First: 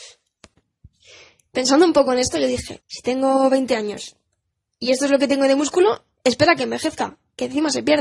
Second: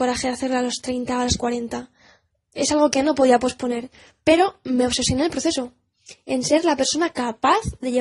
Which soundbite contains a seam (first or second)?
first